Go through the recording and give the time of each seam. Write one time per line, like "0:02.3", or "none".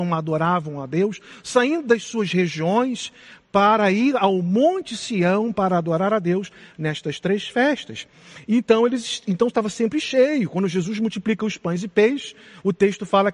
none